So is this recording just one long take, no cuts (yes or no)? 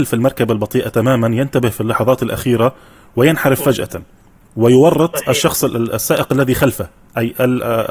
yes